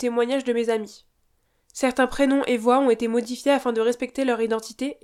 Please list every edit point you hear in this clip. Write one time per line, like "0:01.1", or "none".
none

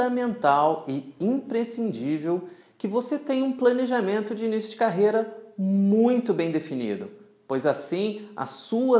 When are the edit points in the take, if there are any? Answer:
none

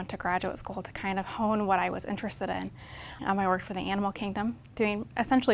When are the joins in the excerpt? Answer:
0:03.2

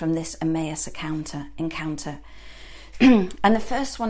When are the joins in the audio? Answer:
0:02.9

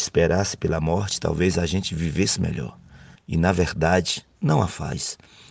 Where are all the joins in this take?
0:03.2

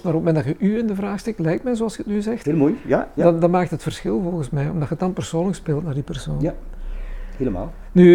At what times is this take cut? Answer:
none

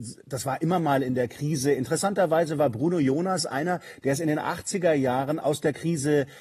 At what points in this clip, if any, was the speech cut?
none

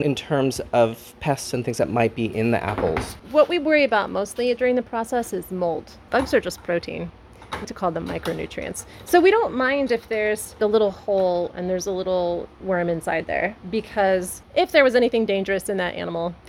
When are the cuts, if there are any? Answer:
0:07.6

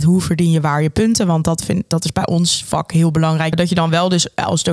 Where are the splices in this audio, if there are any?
0:03.5

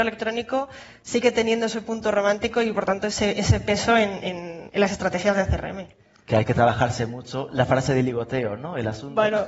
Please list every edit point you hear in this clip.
none

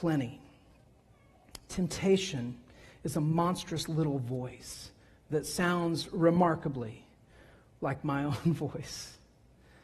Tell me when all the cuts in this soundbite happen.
none

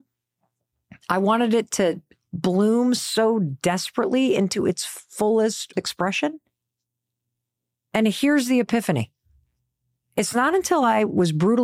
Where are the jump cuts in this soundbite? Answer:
0:07.8

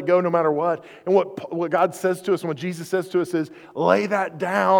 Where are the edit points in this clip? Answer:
none

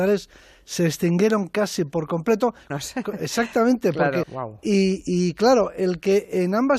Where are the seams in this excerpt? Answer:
0:02.7
0:04.2

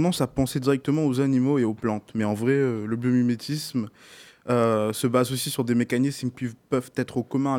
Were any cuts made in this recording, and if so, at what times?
none

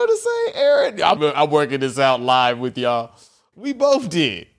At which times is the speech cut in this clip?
0:01.2
0:03.5

